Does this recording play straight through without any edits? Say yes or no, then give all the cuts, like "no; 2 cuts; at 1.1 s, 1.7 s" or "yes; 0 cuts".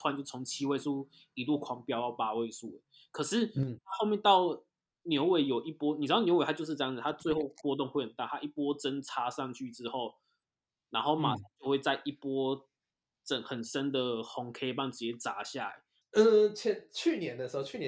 no; 1 cut; at 16.0 s